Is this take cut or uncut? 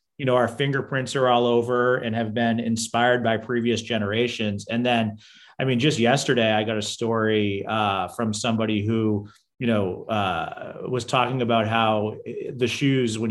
uncut